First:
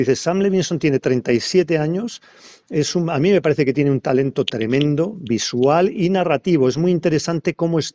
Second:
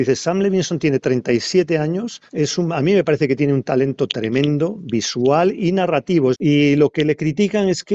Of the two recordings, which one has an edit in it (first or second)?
second